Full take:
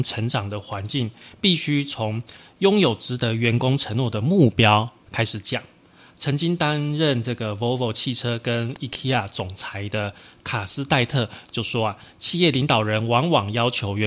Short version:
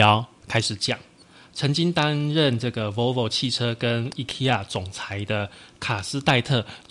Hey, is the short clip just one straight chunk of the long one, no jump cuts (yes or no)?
yes